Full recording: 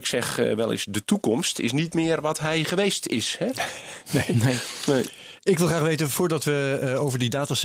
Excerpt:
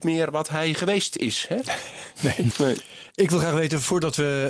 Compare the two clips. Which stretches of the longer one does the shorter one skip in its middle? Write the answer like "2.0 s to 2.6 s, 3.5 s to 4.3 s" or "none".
4.4 s to 4.8 s